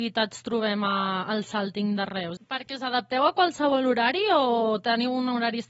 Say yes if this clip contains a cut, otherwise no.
yes